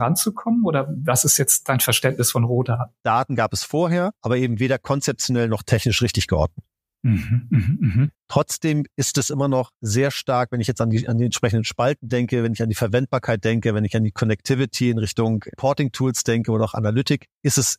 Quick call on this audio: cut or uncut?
cut